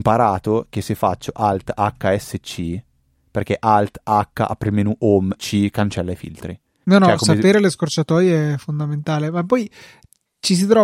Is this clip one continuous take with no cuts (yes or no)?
no